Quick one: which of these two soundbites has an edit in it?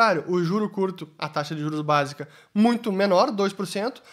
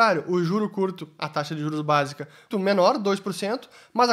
second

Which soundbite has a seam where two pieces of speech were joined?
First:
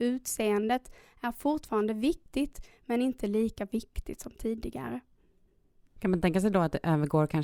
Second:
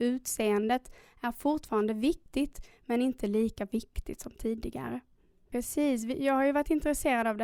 second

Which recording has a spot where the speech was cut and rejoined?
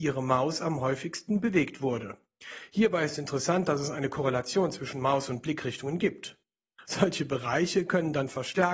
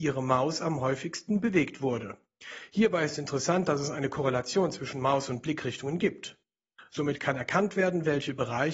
first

